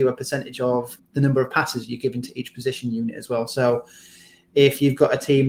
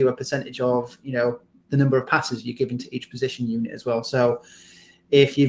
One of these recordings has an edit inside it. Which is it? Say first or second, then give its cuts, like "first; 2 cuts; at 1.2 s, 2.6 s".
first; 1 cut; at 1.0 s